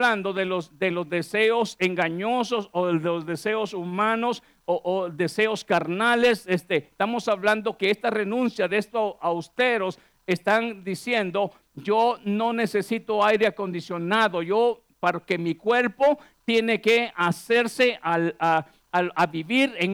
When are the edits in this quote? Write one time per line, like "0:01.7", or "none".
none

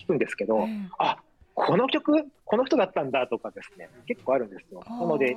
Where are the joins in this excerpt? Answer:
none

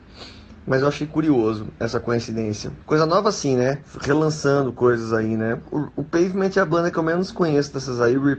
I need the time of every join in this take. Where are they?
0:02.8

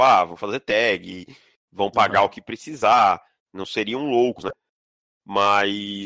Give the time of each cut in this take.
none

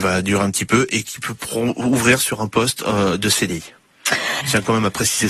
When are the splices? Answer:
0:04.4

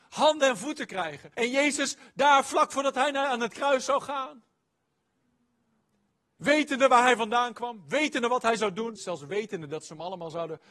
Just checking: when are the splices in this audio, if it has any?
0:01.3
0:09.0

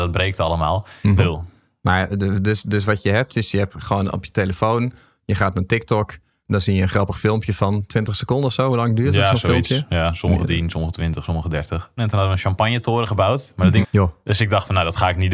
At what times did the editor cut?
0:01.2
0:12.0
0:13.8

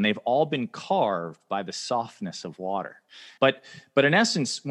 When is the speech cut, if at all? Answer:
0:03.4

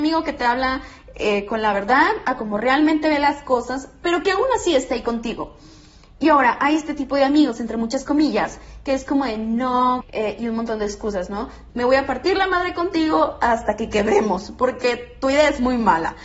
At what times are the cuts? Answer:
0:10.0
0:11.7

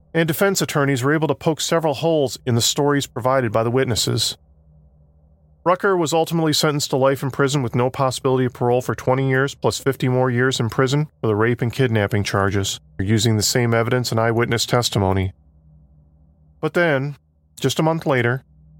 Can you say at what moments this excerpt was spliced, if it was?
0:13.0

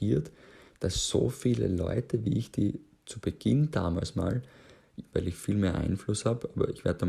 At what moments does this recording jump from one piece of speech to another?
0:05.1

